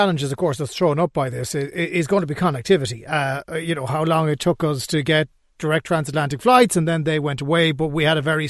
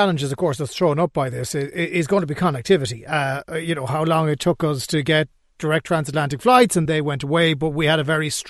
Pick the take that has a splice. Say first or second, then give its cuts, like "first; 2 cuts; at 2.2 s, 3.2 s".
second; 1 cut; at 6.9 s